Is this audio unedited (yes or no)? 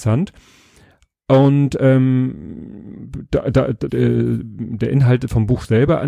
no